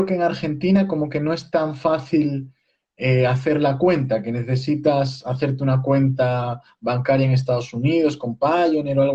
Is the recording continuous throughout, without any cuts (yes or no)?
yes